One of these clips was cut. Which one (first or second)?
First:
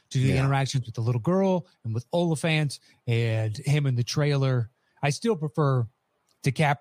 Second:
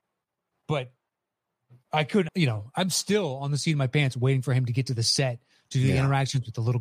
second